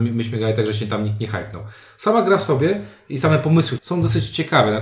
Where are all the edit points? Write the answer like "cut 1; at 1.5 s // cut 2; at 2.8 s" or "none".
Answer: cut 1; at 3.8 s